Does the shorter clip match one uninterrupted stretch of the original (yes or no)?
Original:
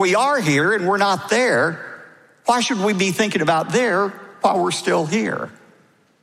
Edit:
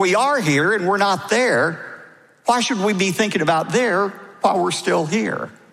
yes